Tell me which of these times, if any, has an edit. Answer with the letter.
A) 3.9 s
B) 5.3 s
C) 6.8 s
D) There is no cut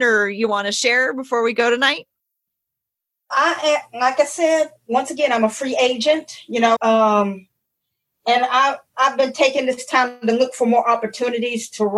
C